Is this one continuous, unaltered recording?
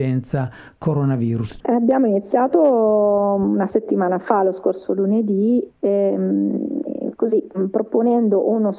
no; 1 cut; at 1.6 s

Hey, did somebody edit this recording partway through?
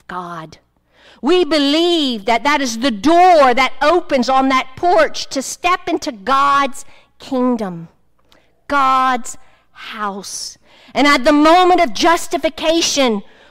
no; 0 cuts

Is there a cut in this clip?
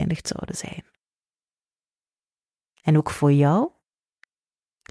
no; 0 cuts

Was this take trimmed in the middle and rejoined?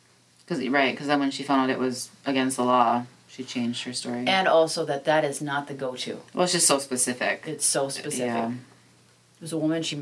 no; 0 cuts

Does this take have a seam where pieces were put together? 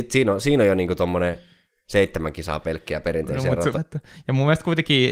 yes; 1 cut; at 3.7 s

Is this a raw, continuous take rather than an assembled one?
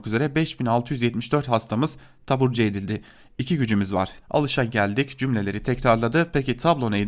no; 1 cut; at 4.2 s

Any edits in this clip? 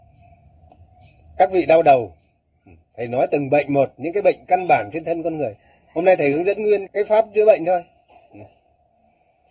yes; 1 cut; at 6.9 s

